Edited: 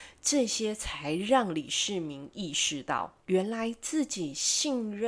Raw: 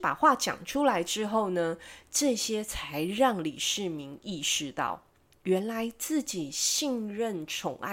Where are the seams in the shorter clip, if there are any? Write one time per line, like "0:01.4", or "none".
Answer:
0:03.2